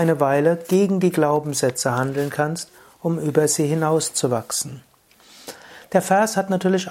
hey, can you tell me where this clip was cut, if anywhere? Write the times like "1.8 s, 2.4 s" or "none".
none